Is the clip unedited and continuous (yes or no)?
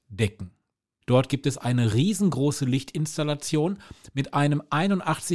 no